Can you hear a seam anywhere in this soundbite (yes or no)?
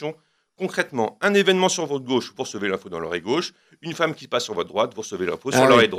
no